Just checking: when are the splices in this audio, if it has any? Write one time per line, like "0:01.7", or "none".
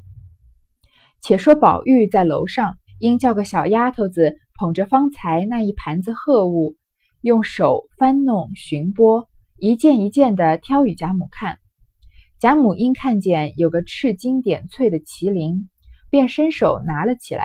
0:02.9
0:07.1

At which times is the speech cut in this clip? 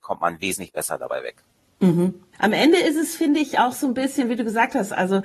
0:02.3

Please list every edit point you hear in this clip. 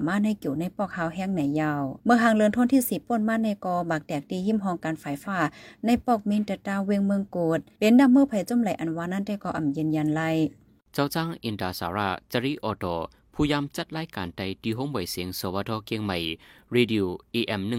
0:05.2

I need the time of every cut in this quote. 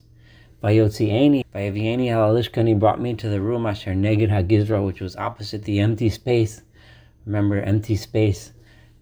0:01.4

